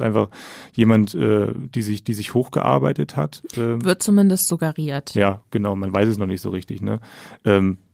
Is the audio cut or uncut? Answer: uncut